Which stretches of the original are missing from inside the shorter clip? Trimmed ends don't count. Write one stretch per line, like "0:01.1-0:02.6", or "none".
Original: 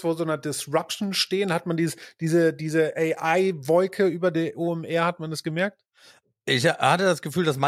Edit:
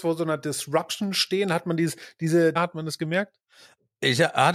0:02.6-0:05.0